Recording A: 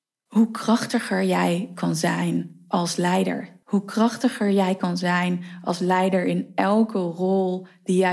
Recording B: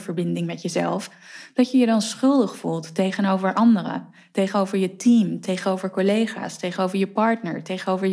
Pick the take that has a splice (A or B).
A